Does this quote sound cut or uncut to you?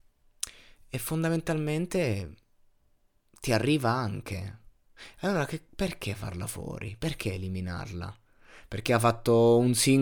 uncut